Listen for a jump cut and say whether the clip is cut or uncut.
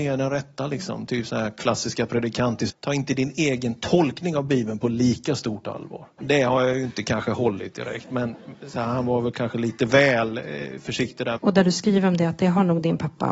cut